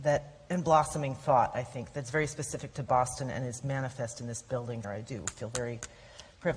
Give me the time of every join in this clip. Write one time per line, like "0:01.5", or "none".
0:04.8